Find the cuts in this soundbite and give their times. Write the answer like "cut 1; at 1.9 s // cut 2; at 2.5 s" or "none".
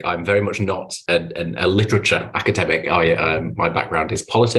none